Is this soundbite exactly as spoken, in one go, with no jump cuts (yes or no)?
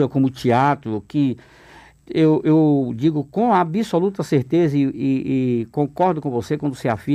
yes